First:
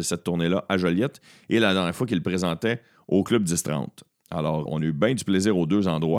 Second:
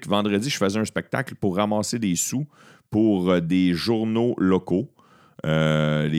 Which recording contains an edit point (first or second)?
first